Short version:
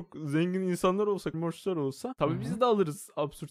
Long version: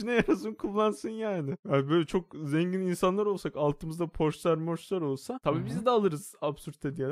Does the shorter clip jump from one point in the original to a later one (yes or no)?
yes